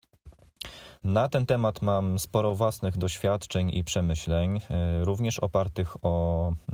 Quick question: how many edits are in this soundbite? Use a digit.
2